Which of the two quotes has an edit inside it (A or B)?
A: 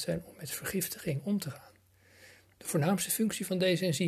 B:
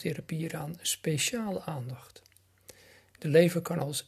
A